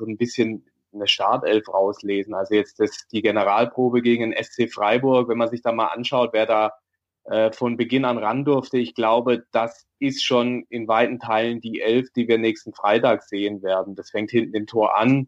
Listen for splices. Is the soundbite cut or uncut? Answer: uncut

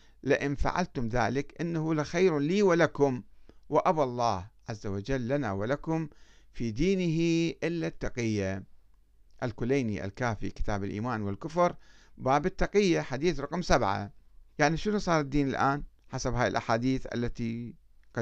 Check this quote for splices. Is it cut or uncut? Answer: cut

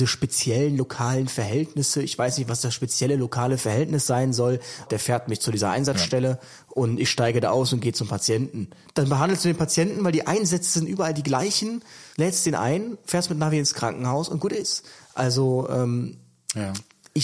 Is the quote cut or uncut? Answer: cut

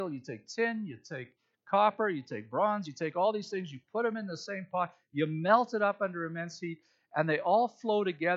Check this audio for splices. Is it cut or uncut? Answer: uncut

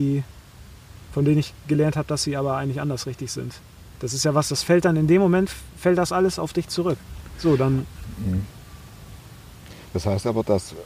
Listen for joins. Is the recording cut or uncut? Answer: uncut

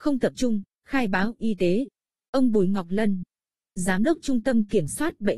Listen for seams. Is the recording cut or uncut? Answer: cut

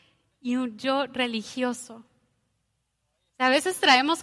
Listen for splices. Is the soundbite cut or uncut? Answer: uncut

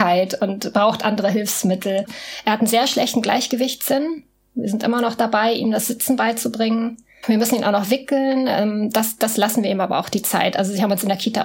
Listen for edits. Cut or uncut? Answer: uncut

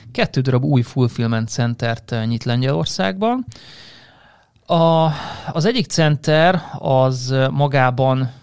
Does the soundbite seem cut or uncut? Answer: uncut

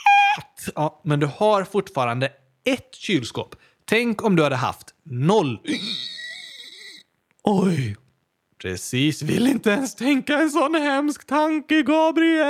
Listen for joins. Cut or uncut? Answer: uncut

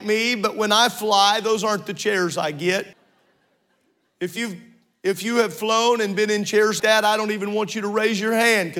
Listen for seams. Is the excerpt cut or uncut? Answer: cut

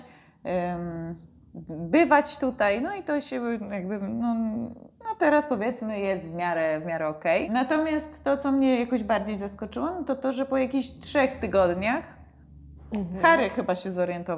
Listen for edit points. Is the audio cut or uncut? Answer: cut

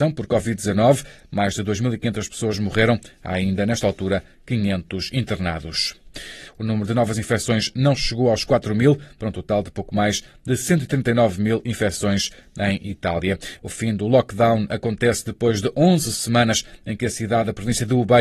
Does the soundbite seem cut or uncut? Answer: cut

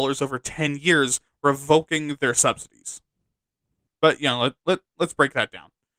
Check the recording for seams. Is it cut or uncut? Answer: cut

